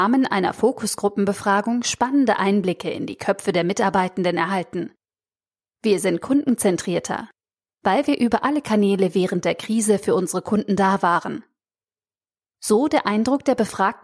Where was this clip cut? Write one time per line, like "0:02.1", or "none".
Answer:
0:05.6